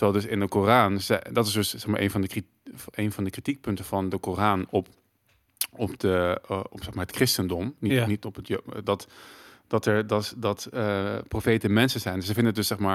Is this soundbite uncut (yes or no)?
yes